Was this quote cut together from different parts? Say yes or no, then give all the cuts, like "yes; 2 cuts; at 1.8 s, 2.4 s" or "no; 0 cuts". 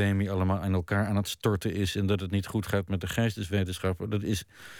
no; 0 cuts